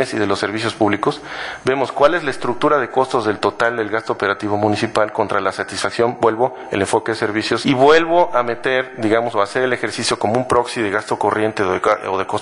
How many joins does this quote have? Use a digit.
1